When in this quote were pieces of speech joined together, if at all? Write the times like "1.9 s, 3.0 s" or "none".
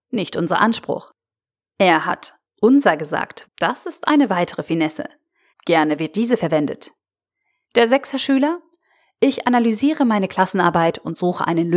3.4 s, 5.5 s, 7.6 s